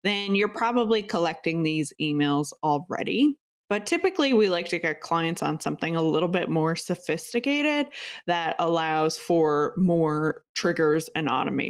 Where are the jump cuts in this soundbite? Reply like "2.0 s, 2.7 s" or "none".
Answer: 3.6 s